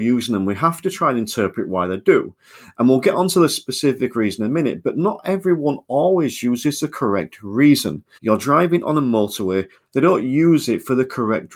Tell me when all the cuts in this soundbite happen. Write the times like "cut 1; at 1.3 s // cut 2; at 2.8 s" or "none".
cut 1; at 8.1 s // cut 2; at 9.7 s

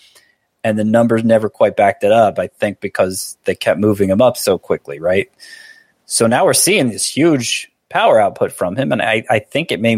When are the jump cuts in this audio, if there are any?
none

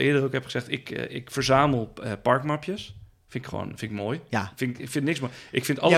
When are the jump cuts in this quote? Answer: none

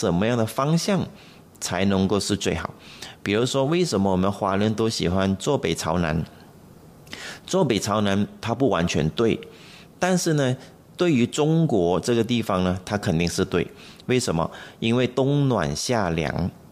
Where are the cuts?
none

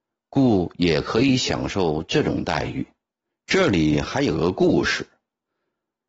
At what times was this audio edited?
cut 1; at 3.3 s

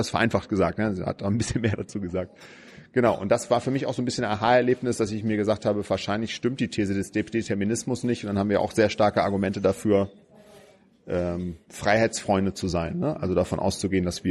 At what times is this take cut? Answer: none

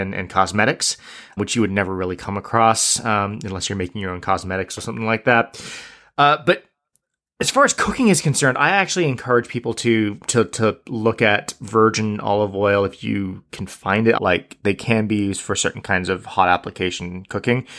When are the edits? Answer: cut 1; at 1.4 s // cut 2; at 14.2 s

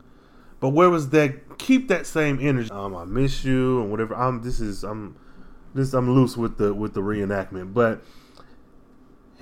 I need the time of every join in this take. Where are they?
cut 1; at 2.7 s

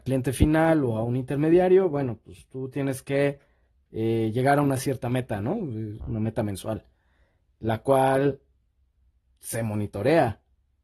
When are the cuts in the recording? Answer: cut 1; at 6.0 s

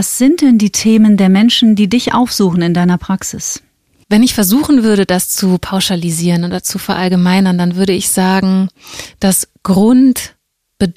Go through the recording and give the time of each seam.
cut 1; at 4.0 s

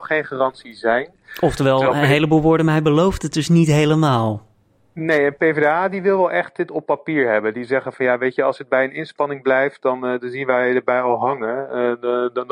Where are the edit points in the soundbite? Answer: none

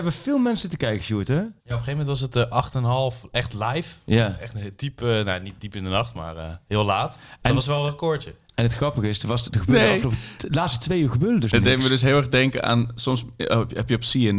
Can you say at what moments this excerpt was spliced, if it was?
cut 1; at 1.6 s

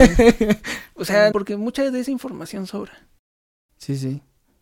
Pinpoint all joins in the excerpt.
cut 1; at 1.3 s

